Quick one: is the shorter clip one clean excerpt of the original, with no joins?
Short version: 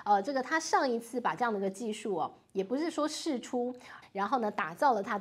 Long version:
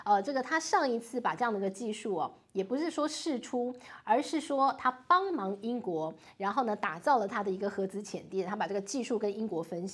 no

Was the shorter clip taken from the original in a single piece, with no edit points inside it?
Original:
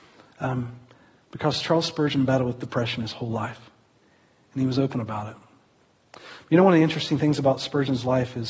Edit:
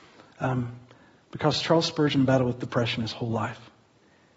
yes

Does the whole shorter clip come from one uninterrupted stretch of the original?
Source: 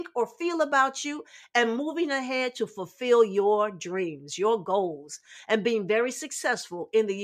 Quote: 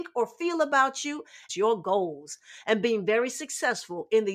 no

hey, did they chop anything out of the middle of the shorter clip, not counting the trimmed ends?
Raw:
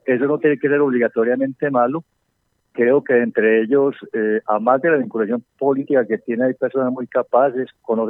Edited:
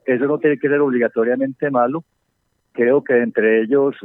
no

